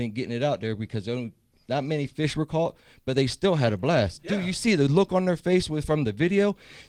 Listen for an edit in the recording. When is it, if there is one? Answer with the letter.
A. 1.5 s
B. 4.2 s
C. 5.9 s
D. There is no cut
D